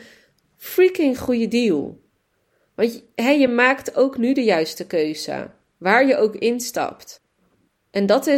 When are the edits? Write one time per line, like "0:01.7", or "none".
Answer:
none